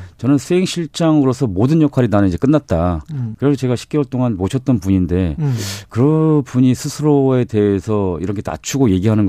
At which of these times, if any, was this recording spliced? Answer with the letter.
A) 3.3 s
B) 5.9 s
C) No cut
A